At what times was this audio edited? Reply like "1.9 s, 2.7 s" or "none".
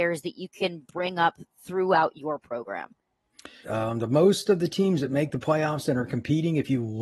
3.6 s